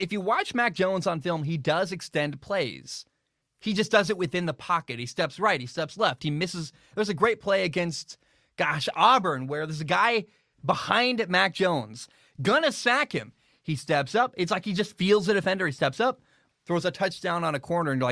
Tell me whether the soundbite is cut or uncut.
cut